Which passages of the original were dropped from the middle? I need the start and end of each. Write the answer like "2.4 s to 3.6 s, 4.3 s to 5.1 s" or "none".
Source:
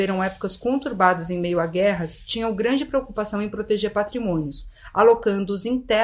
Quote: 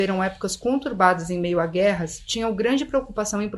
none